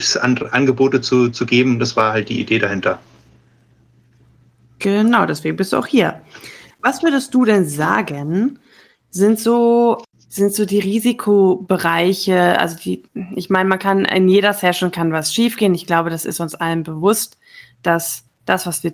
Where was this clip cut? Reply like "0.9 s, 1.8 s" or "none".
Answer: none